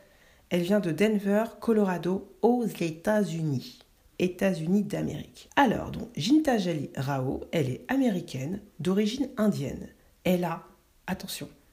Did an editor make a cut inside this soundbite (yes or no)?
yes